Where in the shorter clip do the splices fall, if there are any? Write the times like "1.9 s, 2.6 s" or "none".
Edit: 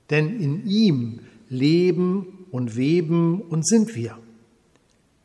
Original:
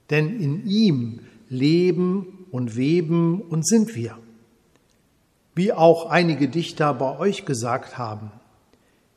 none